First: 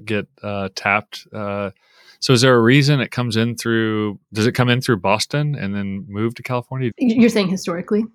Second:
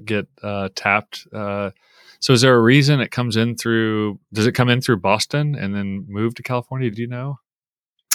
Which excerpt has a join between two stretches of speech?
first; 1 cut; at 6.9 s

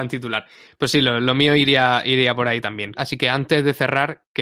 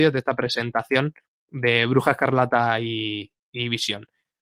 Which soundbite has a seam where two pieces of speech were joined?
first; 1 cut; at 2.9 s

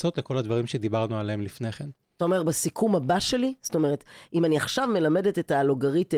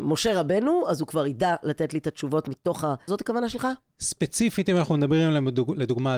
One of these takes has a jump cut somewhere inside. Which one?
second; 1 cut; at 3.1 s

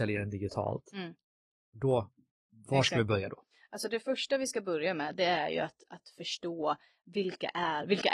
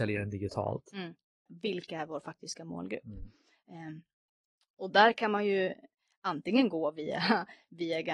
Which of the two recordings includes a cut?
second; 1 cut; at 1.5 s

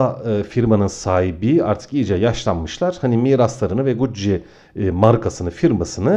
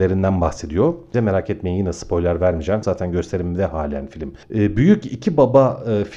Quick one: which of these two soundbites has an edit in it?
second; 2 cuts; at 1.1 s, 2.8 s

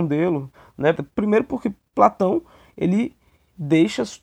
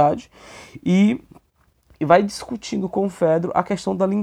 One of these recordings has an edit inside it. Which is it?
first; 1 cut; at 1.0 s

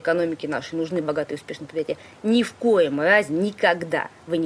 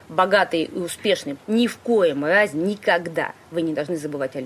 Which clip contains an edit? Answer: second; 1 cut; at 1.4 s

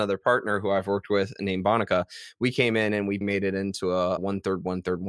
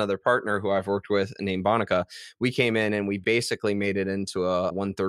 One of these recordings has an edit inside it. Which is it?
first; 1 cut; at 3.2 s

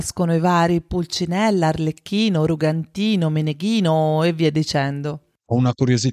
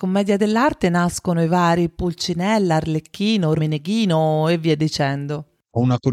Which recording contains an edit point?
second; 1 cut; at 3.6 s

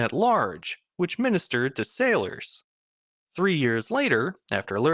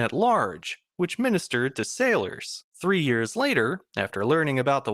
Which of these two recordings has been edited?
second; 1 cut; at 2.7 s

